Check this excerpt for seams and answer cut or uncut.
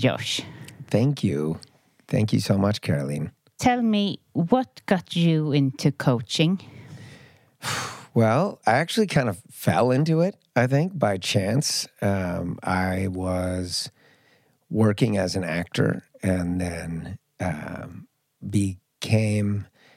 uncut